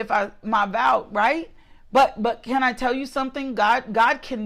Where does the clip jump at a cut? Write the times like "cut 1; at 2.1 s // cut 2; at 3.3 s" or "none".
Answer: none

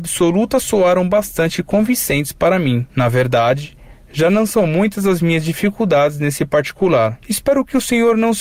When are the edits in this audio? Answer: cut 1; at 7.2 s

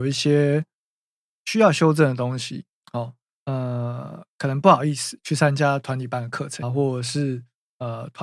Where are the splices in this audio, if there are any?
cut 1; at 3.4 s // cut 2; at 6.6 s

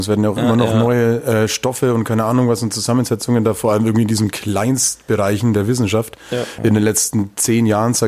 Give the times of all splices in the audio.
cut 1; at 6.6 s

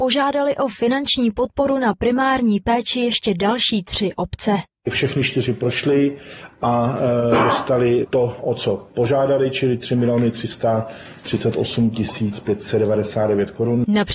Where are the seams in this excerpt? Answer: none

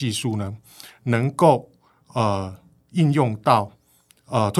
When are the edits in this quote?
none

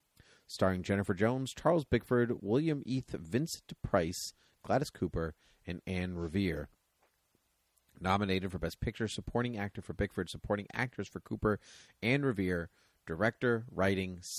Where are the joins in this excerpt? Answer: none

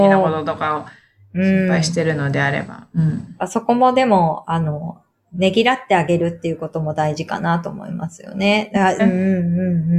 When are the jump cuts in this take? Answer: cut 1; at 9.0 s

